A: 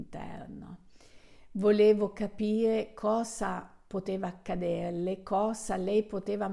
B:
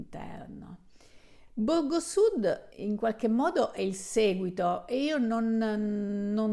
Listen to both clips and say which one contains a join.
B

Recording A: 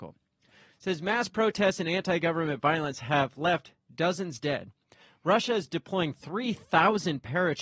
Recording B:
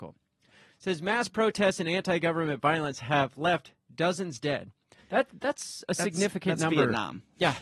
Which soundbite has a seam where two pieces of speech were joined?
B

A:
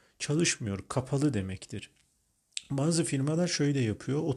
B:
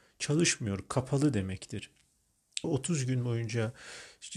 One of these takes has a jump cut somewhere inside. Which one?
B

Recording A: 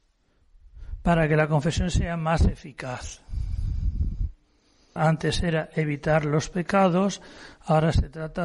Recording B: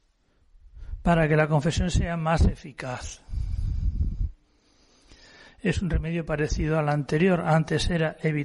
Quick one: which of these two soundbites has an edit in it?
A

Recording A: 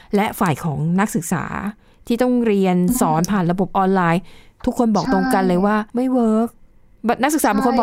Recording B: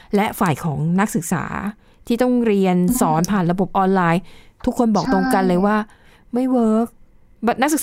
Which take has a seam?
A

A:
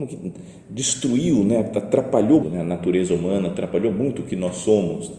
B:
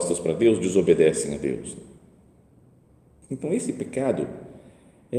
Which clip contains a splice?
A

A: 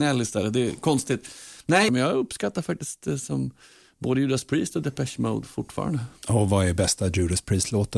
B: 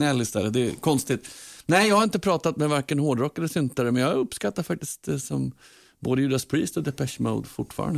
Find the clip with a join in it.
A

